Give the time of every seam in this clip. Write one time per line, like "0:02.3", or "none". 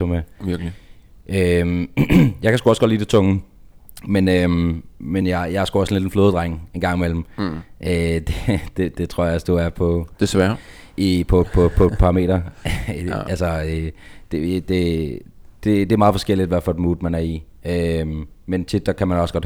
none

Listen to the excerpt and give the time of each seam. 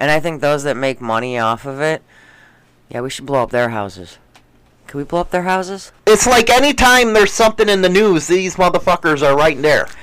0:06.0

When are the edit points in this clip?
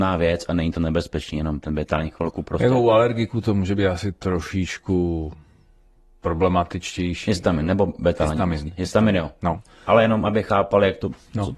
none

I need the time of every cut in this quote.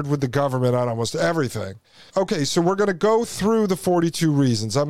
0:02.1

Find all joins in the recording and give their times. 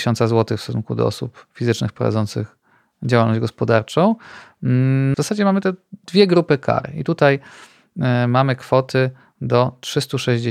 0:05.1

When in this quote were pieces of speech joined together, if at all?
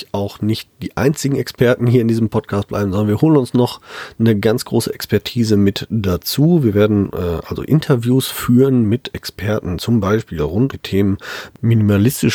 0:10.7

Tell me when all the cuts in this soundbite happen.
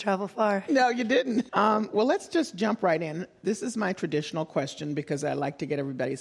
0:01.5

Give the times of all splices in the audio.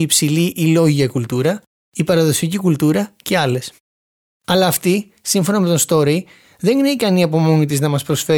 0:04.4

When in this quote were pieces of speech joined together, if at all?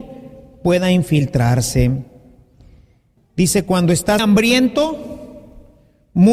0:03.2
0:04.2

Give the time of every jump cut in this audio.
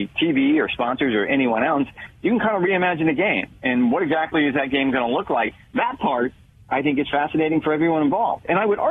none

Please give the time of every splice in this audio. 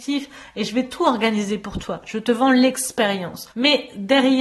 0:03.5

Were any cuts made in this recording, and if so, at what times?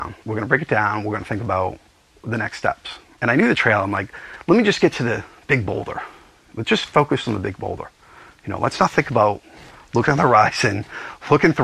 0:03.2

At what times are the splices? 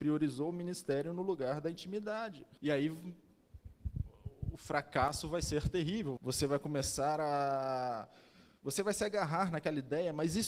0:02.6
0:06.2

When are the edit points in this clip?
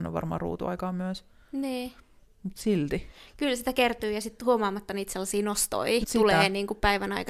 0:06.0

